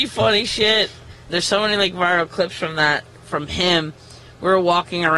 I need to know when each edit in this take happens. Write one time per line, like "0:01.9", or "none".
0:01.3